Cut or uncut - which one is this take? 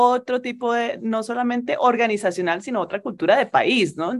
cut